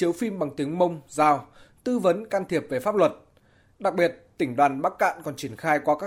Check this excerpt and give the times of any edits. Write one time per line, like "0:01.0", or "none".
none